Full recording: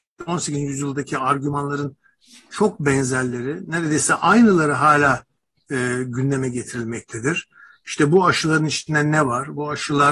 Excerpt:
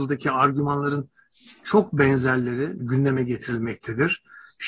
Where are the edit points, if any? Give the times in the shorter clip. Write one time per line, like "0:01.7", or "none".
0:02.8